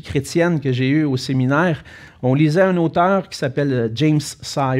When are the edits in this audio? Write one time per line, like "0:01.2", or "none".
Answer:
none